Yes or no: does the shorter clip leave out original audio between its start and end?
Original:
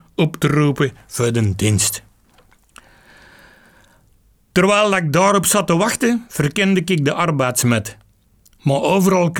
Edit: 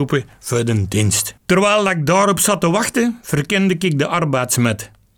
yes